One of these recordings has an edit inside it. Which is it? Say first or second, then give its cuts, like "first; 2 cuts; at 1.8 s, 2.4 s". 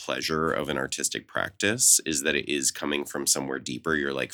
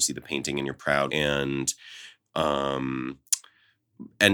second; 1 cut; at 1.1 s